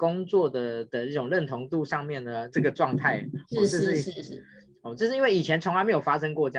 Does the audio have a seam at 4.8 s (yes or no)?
no